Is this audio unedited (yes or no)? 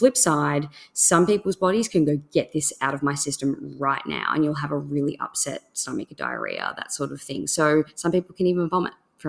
yes